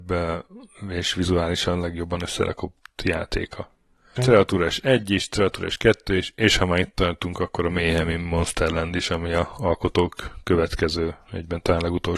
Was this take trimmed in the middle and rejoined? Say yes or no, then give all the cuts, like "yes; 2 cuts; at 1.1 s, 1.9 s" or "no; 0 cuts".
yes; 1 cut; at 4.2 s